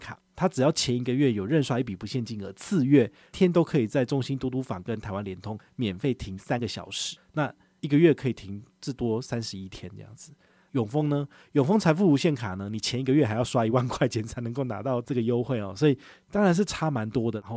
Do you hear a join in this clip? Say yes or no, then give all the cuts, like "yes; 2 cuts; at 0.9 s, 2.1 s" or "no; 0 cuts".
yes; 1 cut; at 3.3 s